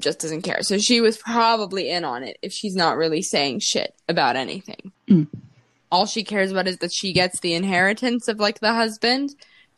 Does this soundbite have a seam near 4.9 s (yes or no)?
yes